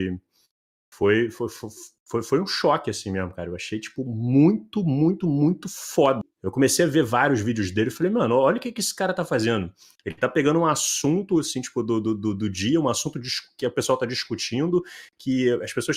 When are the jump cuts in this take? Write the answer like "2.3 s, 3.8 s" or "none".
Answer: 6.2 s